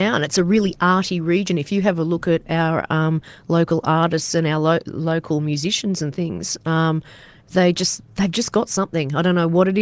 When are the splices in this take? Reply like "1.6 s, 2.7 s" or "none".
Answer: none